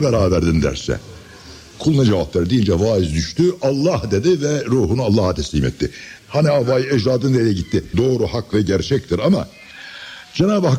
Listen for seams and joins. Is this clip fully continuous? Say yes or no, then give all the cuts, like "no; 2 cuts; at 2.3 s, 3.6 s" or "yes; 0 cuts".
no; 2 cuts; at 6.2 s, 7.9 s